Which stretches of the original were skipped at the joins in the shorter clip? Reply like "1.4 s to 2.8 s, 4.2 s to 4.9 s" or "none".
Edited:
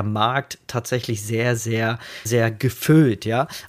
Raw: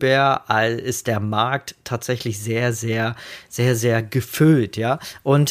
3.4 s to 3.8 s